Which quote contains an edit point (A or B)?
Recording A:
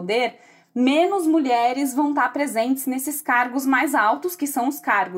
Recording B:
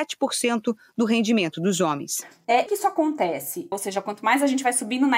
B